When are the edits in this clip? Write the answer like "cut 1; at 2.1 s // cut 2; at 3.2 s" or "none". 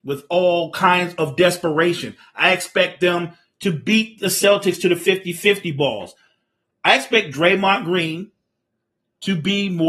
none